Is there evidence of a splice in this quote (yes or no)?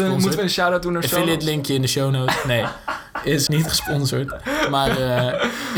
yes